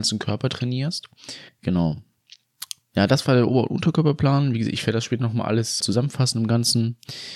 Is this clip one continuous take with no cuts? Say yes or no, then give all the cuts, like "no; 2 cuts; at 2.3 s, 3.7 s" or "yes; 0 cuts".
no; 2 cuts; at 1.5 s, 5.8 s